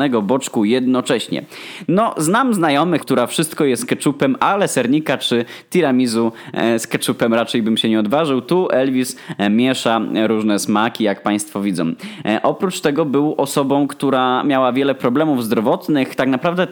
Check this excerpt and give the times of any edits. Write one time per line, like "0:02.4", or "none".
0:03.0

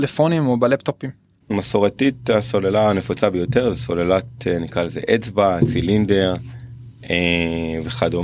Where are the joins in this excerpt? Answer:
0:01.5

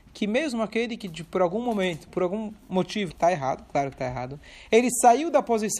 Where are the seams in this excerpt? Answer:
0:02.1
0:03.1

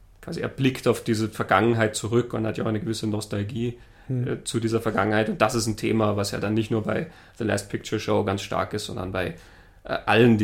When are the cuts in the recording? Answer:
none

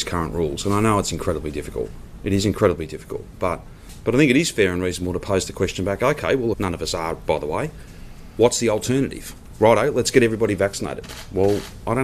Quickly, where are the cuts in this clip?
0:06.5

